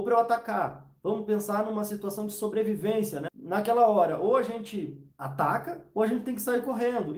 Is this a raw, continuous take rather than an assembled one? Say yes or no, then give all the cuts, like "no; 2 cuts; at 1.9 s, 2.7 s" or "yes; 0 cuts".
no; 2 cuts; at 3.3 s, 5.1 s